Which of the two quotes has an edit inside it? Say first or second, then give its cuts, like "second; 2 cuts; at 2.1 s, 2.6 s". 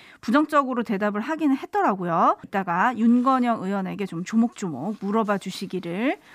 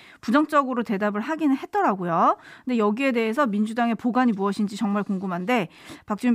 first; 1 cut; at 2.4 s